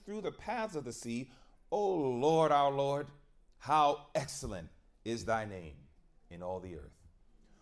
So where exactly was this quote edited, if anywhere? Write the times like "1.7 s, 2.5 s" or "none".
none

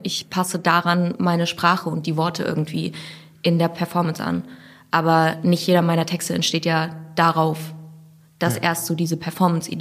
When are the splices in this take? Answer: none

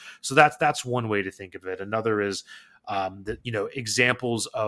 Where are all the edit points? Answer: 3.4 s

